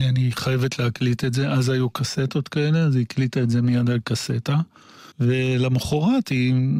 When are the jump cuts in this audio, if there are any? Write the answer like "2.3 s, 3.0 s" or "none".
5.1 s